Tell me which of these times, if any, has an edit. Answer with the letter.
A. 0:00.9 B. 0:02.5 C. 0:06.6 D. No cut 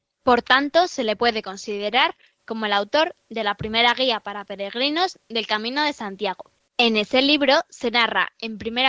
C